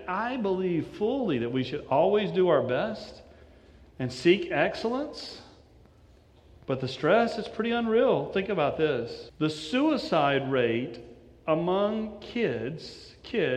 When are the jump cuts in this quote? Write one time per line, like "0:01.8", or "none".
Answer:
0:09.3